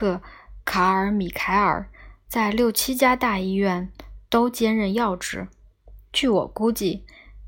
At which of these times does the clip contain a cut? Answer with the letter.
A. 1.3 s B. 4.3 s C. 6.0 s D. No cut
D